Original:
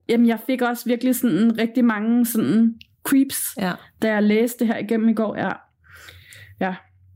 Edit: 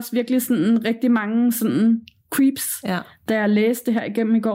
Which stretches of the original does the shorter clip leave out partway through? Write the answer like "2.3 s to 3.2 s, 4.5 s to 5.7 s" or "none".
none